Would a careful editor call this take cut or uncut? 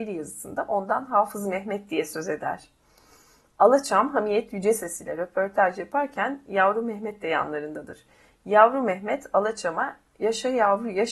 uncut